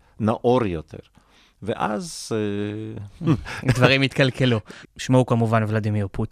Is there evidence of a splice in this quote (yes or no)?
yes